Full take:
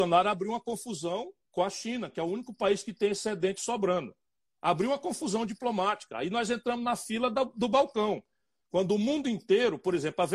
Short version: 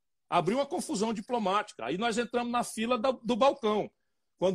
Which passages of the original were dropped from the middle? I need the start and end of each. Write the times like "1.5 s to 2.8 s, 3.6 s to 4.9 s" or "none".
none